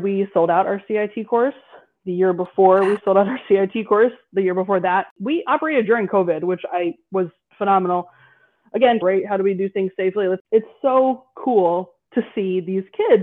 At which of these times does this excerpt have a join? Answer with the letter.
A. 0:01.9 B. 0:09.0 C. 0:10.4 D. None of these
B